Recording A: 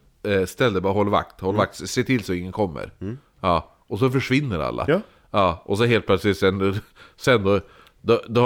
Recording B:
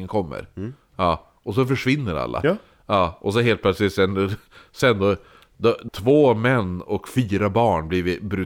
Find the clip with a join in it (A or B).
B